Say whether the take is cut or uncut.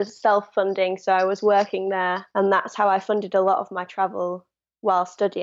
cut